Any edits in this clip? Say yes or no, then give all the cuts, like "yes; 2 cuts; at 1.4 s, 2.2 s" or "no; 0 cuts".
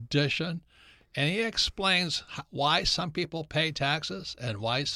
no; 0 cuts